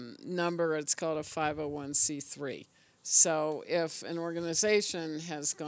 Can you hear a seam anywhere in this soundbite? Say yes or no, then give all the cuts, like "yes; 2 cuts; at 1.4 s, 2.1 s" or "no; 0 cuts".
no; 0 cuts